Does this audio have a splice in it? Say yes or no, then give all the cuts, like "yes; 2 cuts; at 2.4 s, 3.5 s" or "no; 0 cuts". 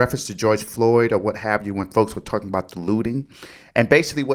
no; 0 cuts